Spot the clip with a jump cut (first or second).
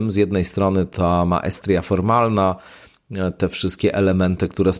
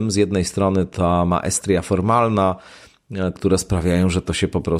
second